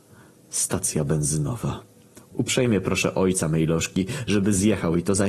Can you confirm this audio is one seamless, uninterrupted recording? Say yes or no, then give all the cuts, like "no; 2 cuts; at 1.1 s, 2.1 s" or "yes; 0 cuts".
yes; 0 cuts